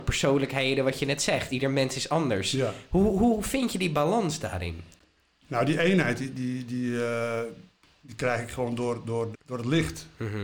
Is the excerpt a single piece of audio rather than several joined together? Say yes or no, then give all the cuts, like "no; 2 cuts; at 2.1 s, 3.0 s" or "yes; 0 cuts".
no; 1 cut; at 9.3 s